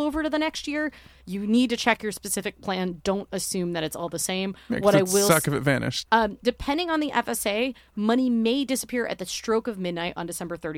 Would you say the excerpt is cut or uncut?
cut